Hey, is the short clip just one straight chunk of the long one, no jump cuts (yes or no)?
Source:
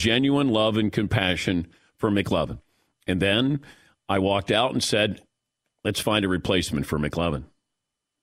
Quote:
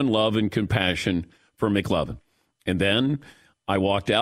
yes